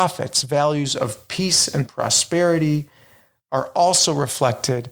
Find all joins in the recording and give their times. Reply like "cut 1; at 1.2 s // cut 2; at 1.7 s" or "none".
none